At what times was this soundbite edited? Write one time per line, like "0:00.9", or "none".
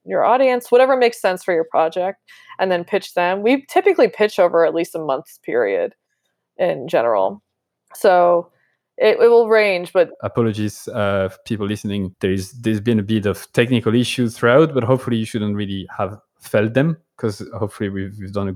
0:10.1